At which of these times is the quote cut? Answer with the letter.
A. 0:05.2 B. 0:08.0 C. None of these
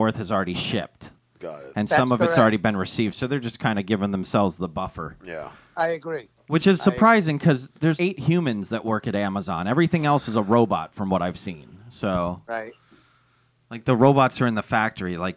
B